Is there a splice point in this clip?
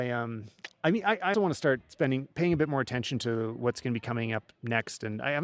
yes; 1 cut; at 1.3 s

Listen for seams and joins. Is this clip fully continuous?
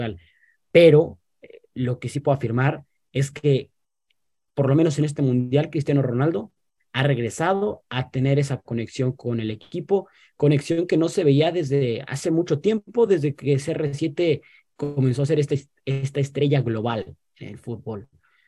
yes; 0 cuts

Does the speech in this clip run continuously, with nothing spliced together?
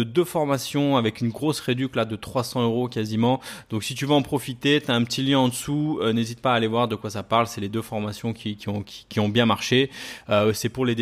yes; 0 cuts

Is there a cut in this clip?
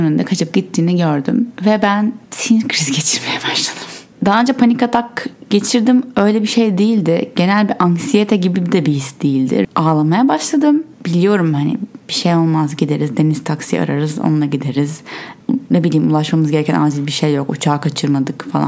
yes; 1 cut; at 9.6 s

